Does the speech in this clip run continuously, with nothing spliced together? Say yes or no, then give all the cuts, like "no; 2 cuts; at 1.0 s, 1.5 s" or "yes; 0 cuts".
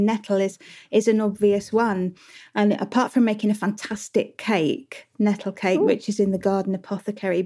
yes; 0 cuts